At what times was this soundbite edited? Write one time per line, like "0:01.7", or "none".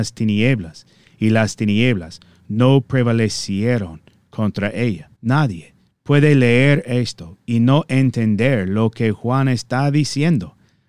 0:05.1